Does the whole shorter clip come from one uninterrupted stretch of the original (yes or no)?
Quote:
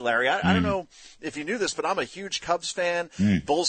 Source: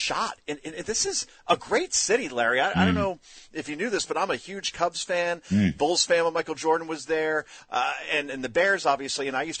yes